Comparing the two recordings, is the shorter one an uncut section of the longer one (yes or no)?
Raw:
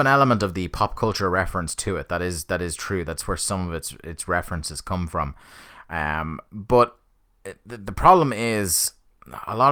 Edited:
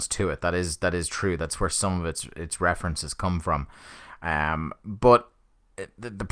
yes